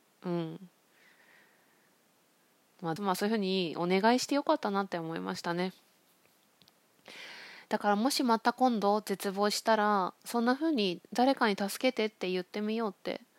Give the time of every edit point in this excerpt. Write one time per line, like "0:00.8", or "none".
0:03.0
0:11.1